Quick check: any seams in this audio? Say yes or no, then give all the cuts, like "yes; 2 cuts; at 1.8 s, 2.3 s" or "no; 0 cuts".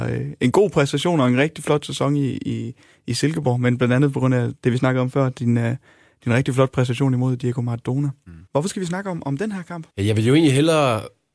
yes; 2 cuts; at 8.5 s, 9.9 s